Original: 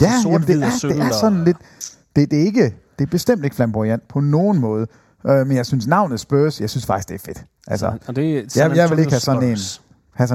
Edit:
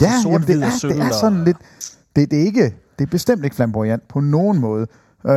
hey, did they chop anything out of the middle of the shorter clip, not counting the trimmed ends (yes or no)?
no